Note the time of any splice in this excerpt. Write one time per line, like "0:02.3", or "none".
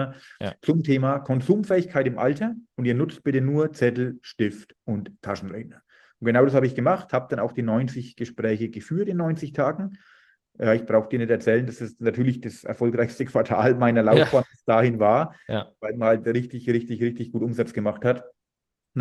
0:02.7